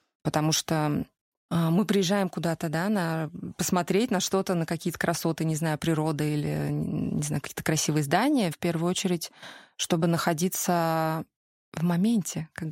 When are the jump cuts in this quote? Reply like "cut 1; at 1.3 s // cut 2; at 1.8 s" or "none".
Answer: cut 1; at 8.5 s